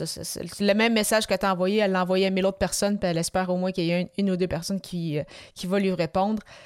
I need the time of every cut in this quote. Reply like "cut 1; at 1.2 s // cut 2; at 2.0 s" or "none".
none